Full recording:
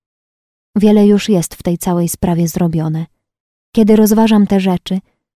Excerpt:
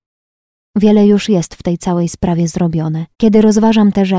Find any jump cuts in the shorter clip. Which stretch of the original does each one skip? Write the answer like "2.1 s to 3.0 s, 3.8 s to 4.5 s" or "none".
3.1 s to 3.7 s